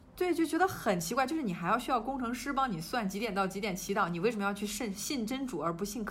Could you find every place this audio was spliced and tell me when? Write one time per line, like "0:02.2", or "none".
none